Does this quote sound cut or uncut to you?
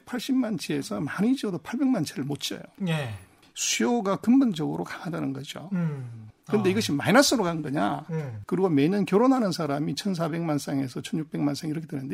cut